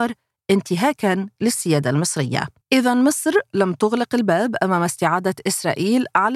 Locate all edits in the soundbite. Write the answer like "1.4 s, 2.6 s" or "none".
2.6 s